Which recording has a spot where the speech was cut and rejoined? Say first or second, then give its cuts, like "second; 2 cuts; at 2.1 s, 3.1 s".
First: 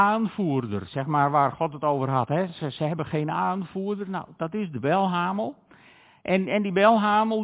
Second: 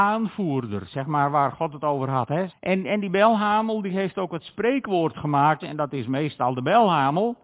second; 2 cuts; at 2.5 s, 5.6 s